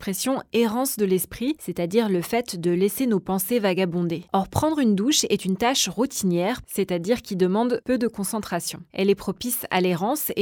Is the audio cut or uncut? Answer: cut